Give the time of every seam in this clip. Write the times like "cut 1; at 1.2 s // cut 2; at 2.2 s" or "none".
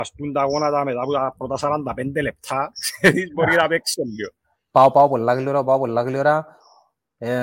none